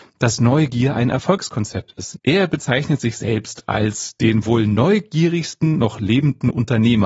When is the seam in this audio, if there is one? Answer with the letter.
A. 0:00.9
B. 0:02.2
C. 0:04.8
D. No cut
B